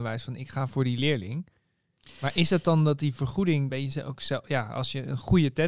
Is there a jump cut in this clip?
yes; 1 cut; at 3.7 s

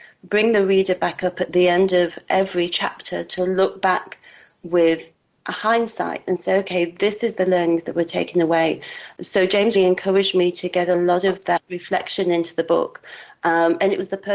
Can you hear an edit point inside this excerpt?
yes; 1 cut; at 9.7 s

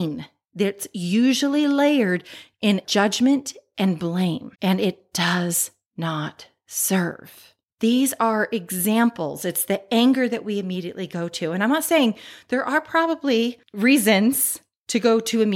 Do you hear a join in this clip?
yes; 1 cut; at 4.5 s

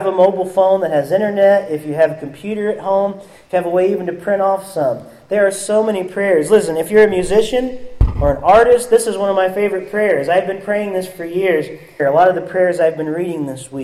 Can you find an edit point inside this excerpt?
yes; 1 cut; at 12.0 s

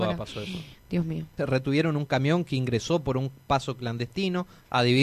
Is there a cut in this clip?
yes; 1 cut; at 1.4 s

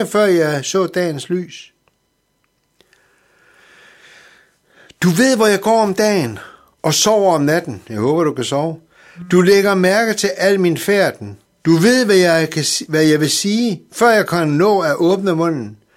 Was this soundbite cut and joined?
no; 0 cuts

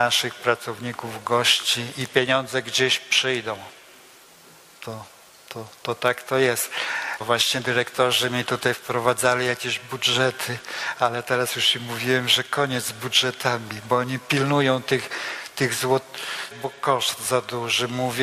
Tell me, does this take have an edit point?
yes; 2 cuts; at 7.2 s, 16.5 s

